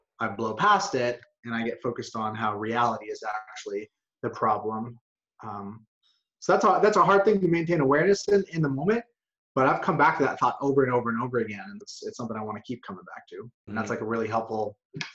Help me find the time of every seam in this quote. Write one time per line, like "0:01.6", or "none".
0:11.8
0:13.7